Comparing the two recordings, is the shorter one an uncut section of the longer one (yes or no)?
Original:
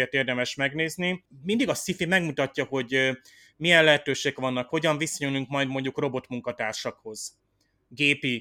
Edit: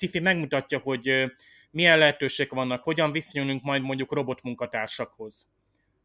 yes